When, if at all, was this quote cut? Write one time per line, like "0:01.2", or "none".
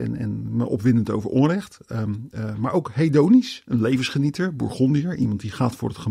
none

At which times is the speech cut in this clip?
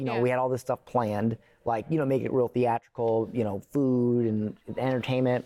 none

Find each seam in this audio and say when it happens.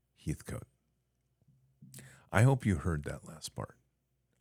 none

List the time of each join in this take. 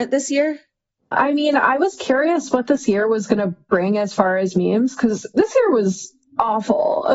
0:01.1

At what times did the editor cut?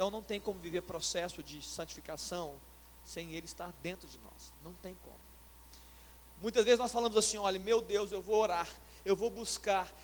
none

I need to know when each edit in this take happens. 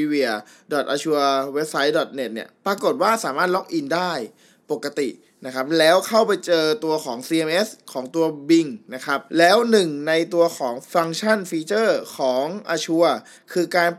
0:09.3

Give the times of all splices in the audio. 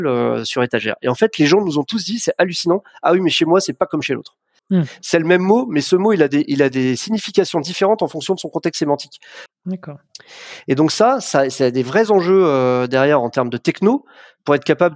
0:04.6
0:09.5

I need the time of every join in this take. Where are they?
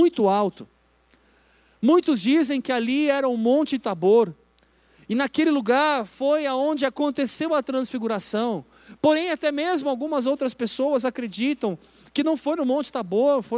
none

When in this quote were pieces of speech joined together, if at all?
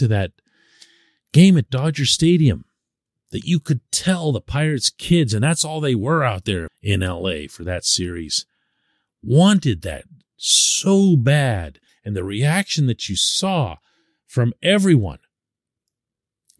0:06.7
0:11.9

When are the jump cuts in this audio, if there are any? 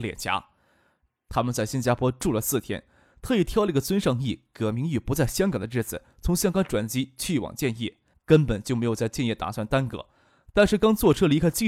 0:01.1
0:08.1

